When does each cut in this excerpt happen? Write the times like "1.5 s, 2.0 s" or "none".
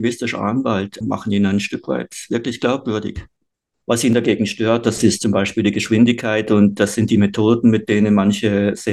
1.0 s, 3.8 s